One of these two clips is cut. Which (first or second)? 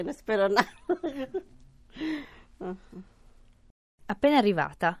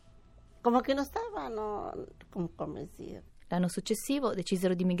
second